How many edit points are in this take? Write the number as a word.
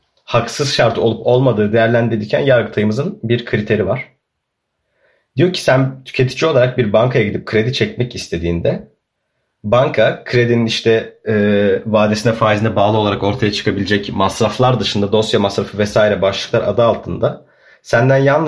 zero